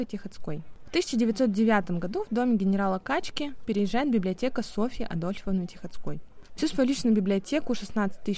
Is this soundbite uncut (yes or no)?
yes